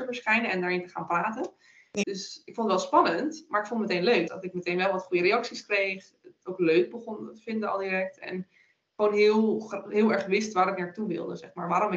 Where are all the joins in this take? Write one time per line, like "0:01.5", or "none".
0:02.0
0:04.3